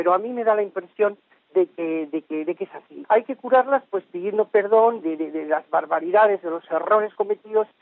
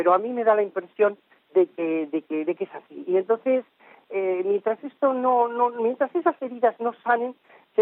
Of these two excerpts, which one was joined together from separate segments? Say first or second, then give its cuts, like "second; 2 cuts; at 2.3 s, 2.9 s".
first; 2 cuts; at 3.0 s, 5.0 s